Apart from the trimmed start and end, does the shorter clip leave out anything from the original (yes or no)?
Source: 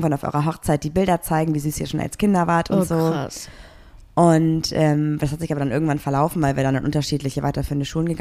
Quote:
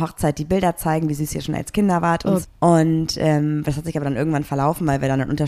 yes